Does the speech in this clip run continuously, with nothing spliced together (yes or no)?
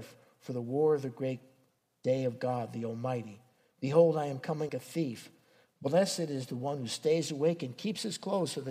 no